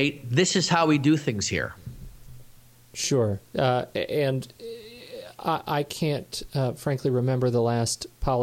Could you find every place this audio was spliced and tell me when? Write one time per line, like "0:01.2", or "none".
none